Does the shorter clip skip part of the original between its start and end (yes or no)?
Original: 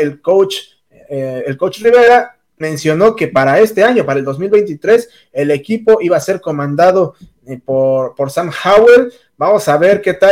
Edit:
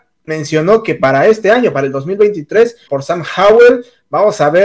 yes